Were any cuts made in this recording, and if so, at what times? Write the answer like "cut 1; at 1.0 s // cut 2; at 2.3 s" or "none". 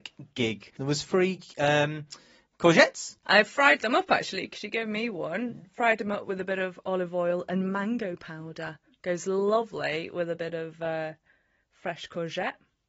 cut 1; at 3.2 s